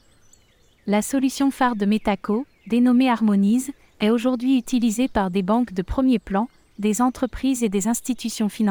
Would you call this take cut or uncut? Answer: uncut